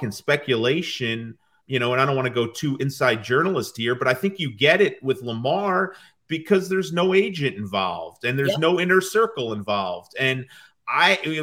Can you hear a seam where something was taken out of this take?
yes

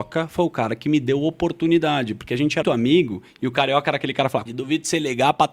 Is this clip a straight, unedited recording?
no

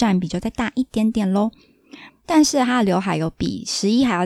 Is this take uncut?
no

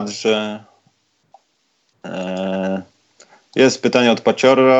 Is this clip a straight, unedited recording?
yes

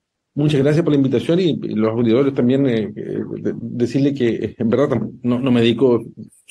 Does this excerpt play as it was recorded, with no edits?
yes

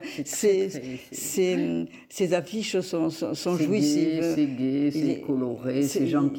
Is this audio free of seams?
yes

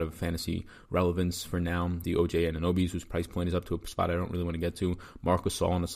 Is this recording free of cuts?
yes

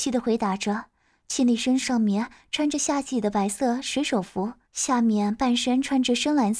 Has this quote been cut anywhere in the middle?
yes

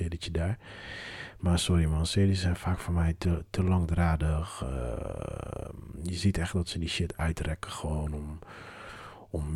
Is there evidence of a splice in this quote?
no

